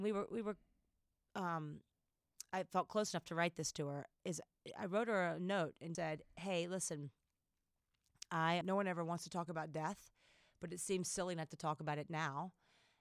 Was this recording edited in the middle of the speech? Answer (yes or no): yes